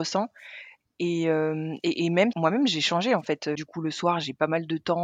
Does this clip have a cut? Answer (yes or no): yes